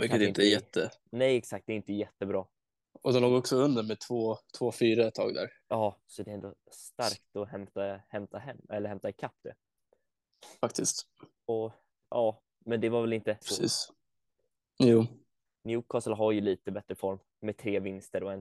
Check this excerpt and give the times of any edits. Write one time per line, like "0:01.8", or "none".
0:13.4